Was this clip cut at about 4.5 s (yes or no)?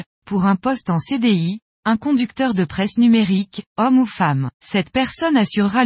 yes